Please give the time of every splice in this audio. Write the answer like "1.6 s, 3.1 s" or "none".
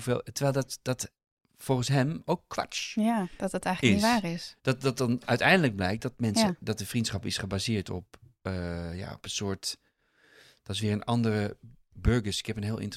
none

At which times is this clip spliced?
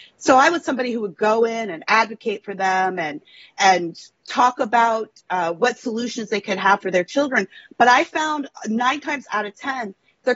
none

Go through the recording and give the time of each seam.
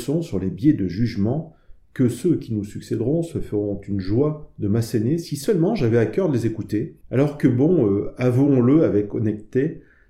none

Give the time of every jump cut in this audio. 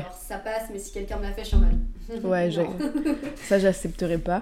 none

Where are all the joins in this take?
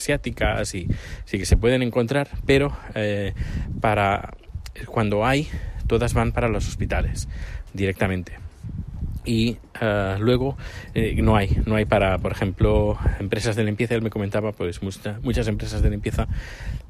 none

